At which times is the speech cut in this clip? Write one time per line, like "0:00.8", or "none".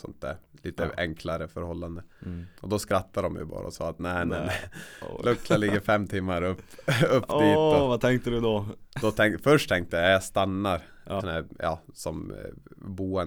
0:02.6
0:11.2